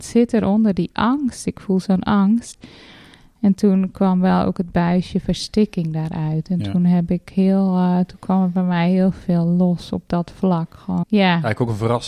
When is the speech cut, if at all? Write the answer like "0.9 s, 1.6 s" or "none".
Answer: 11.0 s